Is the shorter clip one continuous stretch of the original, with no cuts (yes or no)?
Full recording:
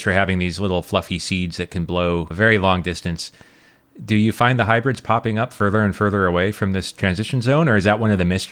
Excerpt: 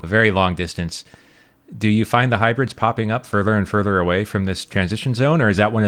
yes